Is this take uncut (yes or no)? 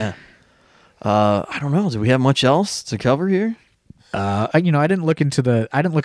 no